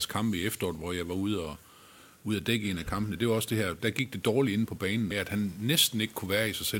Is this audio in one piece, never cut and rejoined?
no; 2 cuts; at 3.8 s, 5.1 s

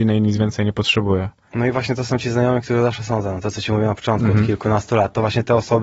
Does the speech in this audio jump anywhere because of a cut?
no; 0 cuts

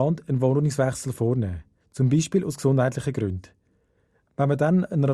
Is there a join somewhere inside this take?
no; 0 cuts

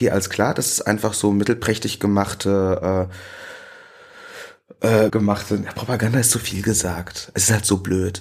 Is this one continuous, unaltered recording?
no; 1 cut; at 5.1 s

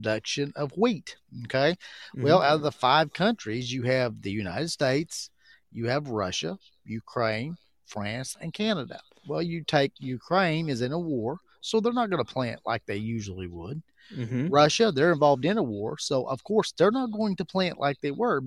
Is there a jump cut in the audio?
no; 0 cuts

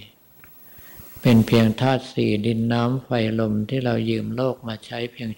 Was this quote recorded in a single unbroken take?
yes; 0 cuts

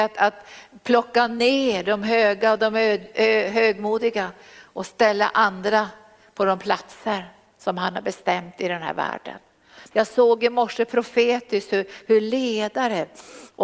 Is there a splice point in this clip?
yes; 1 cut; at 9.9 s

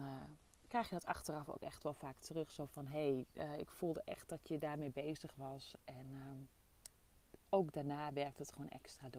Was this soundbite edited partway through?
no; 0 cuts

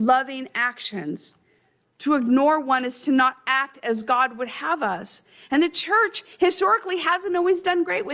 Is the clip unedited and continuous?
yes; 0 cuts

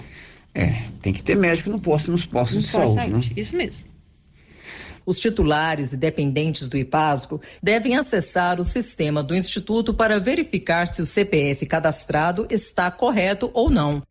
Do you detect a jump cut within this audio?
yes; 2 cuts; at 5.0 s, 7.6 s

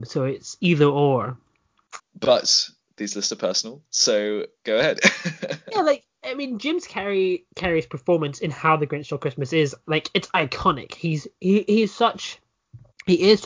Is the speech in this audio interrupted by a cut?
yes; 1 cut; at 2.0 s

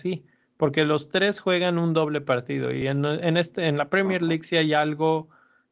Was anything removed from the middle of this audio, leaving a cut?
no; 0 cuts

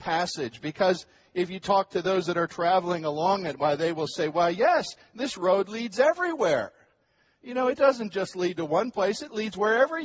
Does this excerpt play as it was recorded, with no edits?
yes; 0 cuts

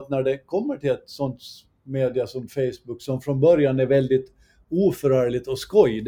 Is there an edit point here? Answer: no; 0 cuts

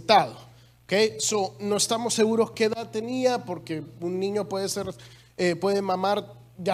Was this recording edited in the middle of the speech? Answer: no; 0 cuts

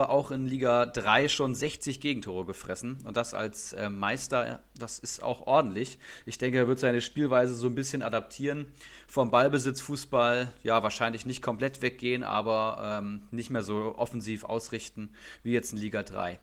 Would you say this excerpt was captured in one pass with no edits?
yes; 0 cuts

